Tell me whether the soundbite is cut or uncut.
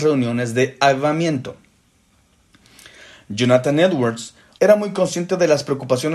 cut